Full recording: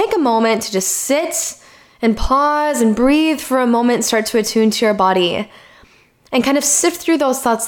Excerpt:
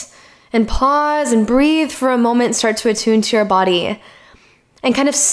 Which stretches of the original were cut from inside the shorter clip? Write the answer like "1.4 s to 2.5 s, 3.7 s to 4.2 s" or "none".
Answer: none